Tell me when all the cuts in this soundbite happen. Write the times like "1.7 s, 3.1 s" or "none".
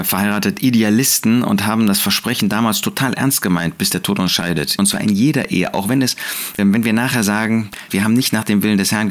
4.8 s, 6.6 s, 7.9 s